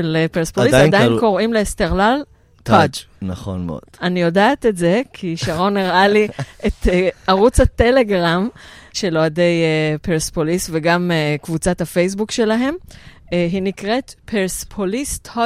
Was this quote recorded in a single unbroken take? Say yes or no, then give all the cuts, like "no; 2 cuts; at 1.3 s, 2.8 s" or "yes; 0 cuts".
no; 1 cut; at 8.9 s